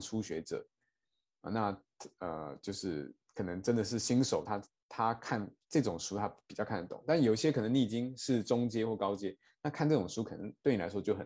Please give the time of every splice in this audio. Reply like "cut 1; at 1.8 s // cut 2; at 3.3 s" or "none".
none